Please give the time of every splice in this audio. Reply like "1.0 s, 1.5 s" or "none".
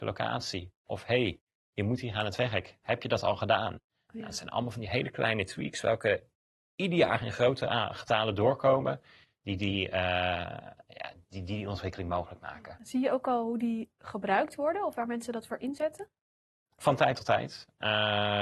none